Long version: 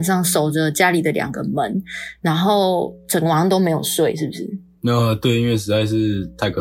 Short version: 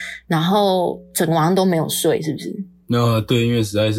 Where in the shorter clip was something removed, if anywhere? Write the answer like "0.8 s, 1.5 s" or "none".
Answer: none